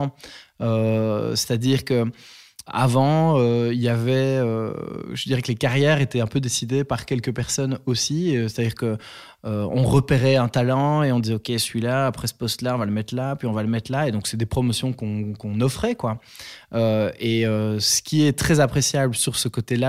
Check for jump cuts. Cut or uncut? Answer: cut